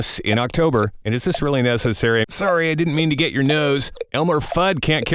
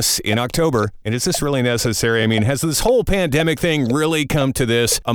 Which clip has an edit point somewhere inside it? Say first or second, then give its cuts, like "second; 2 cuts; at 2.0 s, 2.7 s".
first; 1 cut; at 2.2 s